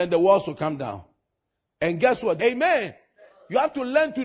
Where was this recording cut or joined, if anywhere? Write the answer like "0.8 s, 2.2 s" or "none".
2.4 s